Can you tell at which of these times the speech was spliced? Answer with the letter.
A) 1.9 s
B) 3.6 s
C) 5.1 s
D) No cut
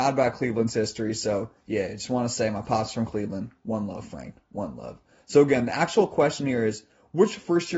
D